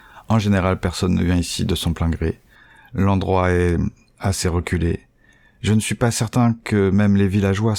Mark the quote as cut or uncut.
uncut